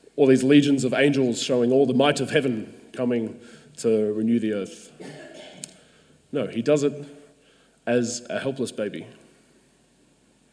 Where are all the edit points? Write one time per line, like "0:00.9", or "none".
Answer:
none